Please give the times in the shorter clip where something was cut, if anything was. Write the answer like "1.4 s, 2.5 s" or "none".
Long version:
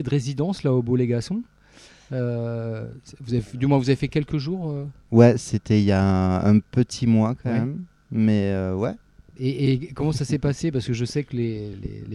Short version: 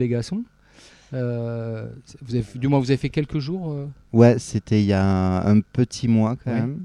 none